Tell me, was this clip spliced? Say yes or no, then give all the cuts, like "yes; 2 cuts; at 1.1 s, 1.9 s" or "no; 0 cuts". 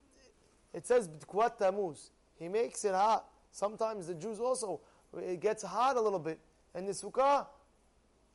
no; 0 cuts